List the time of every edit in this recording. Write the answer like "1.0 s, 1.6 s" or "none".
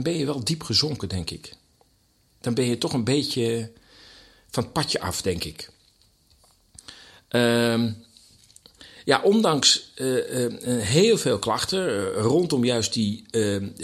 none